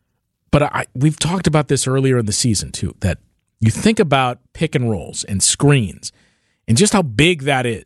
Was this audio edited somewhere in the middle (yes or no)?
no